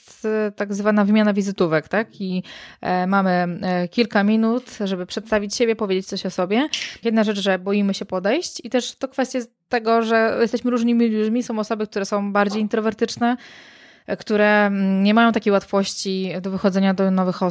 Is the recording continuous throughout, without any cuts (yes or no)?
no